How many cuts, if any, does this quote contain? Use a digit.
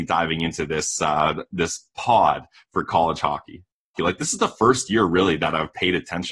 1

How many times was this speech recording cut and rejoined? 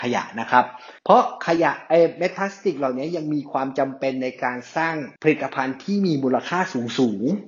2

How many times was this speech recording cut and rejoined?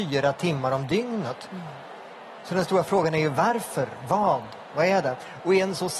0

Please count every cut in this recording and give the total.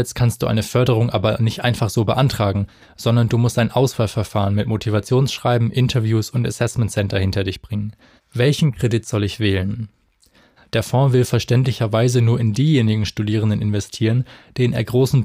2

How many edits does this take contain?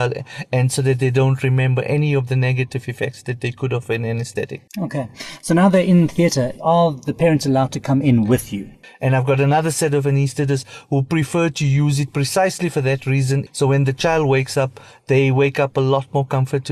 3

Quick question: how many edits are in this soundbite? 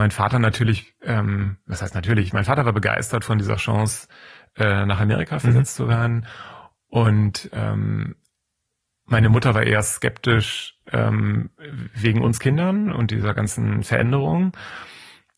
0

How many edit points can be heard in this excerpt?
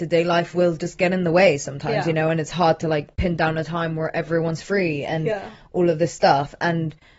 0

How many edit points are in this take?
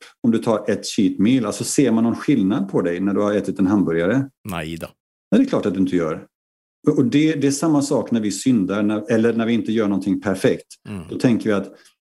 1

